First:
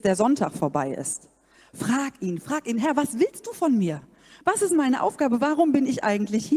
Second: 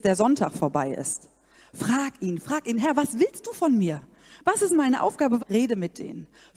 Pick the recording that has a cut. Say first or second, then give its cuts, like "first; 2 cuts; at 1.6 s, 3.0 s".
second; 1 cut; at 5.4 s